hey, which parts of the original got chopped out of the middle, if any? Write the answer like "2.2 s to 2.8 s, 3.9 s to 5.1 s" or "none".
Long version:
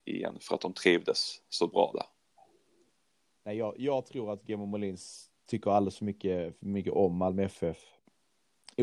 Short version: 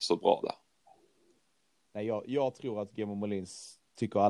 none